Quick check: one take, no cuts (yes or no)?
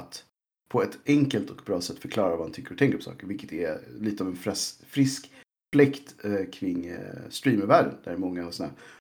yes